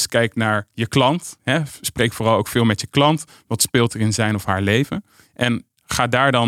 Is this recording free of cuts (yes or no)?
yes